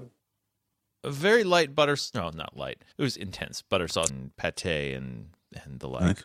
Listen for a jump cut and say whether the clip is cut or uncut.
cut